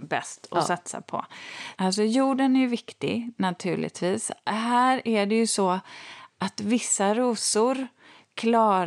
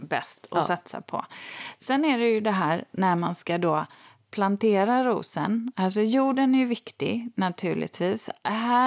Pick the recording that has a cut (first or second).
first